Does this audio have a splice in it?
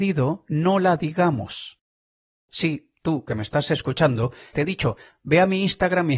yes; 2 cuts; at 2.3 s, 4.5 s

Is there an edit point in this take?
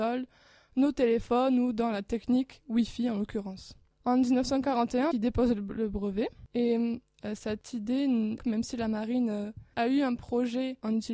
yes; 3 cuts; at 5.1 s, 8.4 s, 9.7 s

